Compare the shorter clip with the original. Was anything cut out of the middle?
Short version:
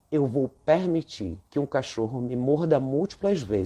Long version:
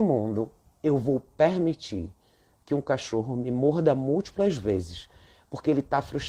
yes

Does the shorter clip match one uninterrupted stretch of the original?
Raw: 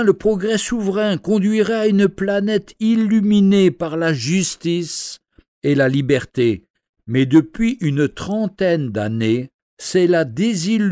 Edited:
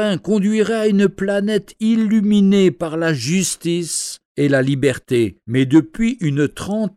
no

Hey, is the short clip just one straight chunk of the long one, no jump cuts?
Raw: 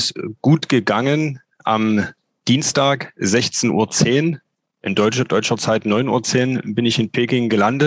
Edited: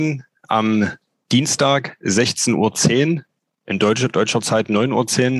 yes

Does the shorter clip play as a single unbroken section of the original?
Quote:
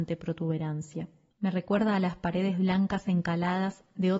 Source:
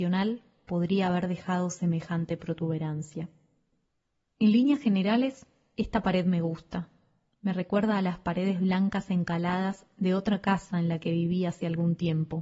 no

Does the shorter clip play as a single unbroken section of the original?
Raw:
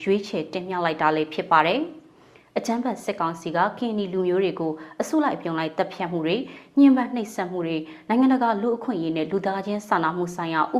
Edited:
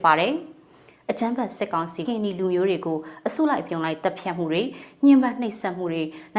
no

